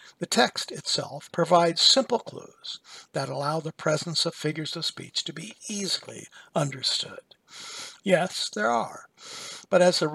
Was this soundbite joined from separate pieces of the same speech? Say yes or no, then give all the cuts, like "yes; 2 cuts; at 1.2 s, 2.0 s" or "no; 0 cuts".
yes; 2 cuts; at 1.3 s, 8.0 s